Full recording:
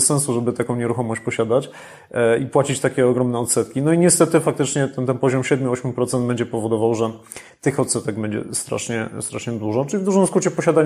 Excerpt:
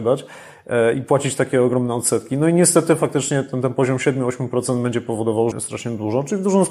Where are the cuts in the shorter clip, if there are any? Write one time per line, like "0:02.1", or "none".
0:05.5